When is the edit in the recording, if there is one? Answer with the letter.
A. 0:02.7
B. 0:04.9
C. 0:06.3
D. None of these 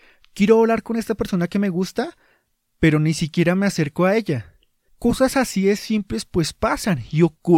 B